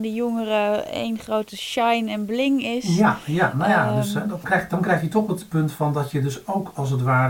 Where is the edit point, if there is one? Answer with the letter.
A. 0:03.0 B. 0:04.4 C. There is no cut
B